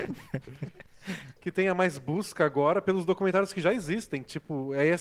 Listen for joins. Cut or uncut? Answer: cut